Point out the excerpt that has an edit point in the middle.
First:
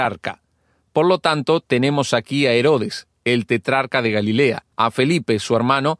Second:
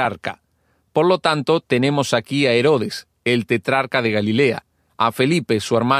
first; 1 cut; at 4.7 s

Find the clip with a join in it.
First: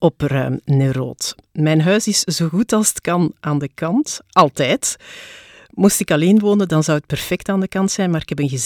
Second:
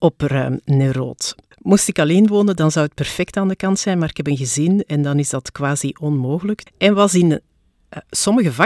second; 2 cuts; at 1.5 s, 6.7 s

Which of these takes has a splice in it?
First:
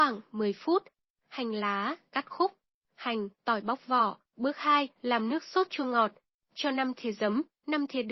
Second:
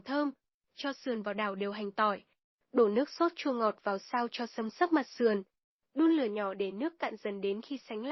first; 2 cuts; at 2.1 s, 4.2 s

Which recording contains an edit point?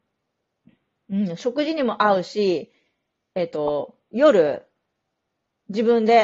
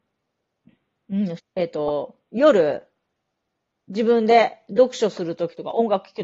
second; 1 cut; at 1.4 s

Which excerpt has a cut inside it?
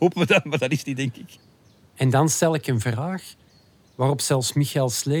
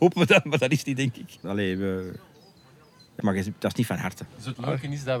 second; 3 cuts; at 1.4 s, 3.2 s, 4.3 s

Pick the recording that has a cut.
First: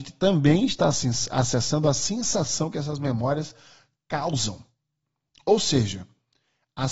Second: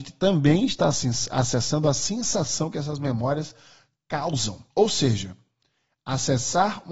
second; 1 cut; at 4.7 s

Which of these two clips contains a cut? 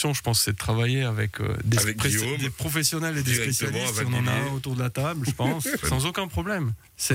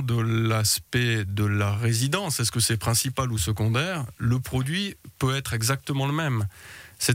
first; 1 cut; at 5.8 s

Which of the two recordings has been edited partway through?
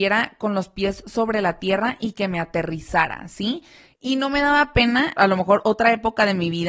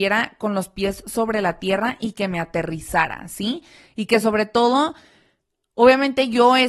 first; 2 cuts; at 3.9 s, 5.2 s

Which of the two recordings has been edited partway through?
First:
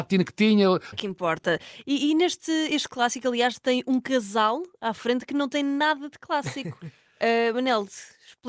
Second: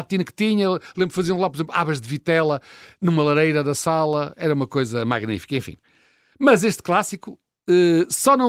first; 1 cut; at 0.9 s

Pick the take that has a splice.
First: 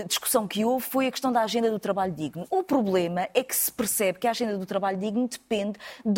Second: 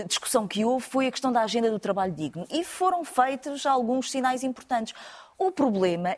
first; 1 cut; at 2.5 s

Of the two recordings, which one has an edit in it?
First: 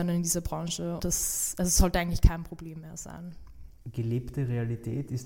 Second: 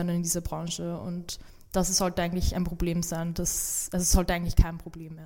first; 2 cuts; at 1.0 s, 3.8 s

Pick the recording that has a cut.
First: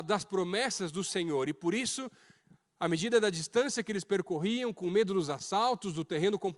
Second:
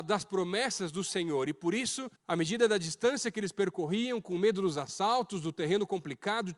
second; 1 cut; at 2.2 s

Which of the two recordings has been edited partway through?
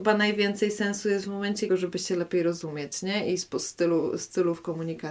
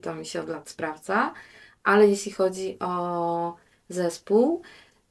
first; 1 cut; at 1.7 s

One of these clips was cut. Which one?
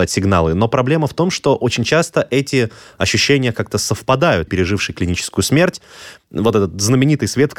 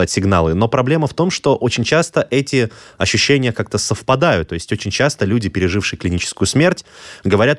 first; 2 cuts; at 4.5 s, 6.2 s

